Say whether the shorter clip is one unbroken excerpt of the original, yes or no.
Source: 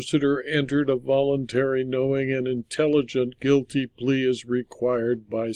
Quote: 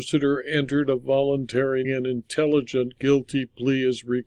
no